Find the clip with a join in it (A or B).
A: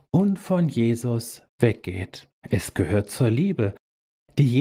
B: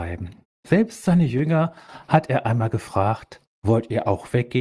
A